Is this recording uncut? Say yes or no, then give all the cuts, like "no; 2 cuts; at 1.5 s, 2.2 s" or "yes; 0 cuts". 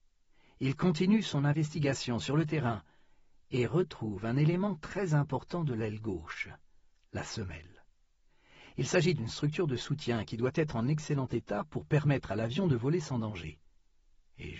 yes; 0 cuts